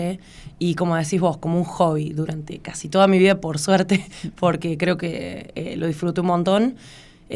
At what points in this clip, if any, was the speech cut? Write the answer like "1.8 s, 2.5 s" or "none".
none